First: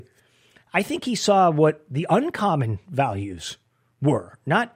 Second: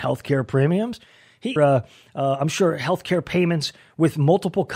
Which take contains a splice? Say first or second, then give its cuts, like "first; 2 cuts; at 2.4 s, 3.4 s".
second; 1 cut; at 1.6 s